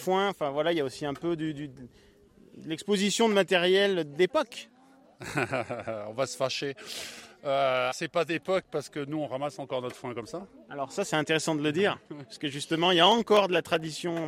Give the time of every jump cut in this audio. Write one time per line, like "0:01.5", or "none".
0:07.9

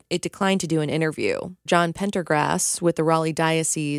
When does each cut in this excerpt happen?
0:01.7

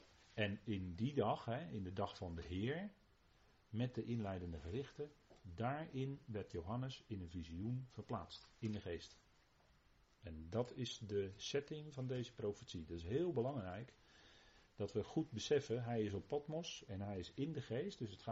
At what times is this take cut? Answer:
none

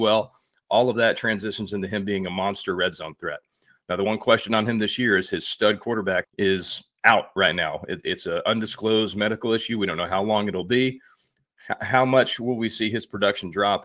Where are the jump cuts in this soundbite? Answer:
0:06.2

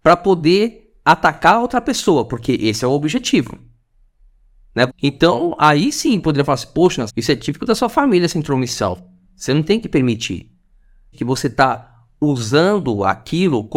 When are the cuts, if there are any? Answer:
0:04.9
0:07.1
0:11.1

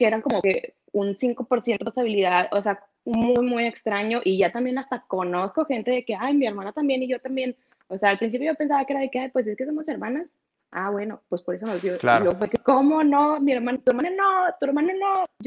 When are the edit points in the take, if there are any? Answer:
none

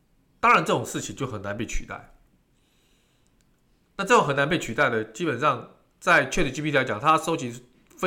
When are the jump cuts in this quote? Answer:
none

